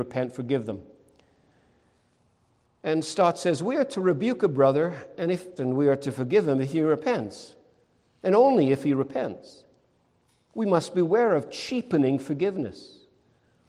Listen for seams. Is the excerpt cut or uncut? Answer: cut